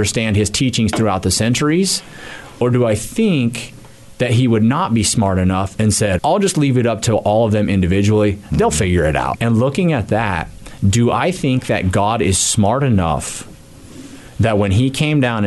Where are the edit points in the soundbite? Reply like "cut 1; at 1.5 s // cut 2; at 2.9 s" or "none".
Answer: cut 1; at 6.2 s // cut 2; at 9.3 s